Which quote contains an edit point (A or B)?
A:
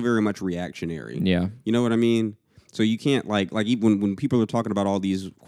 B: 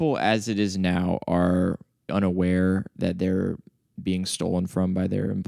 B